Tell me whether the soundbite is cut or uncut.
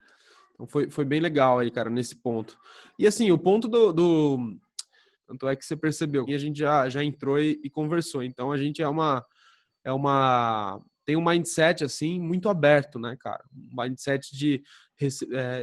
cut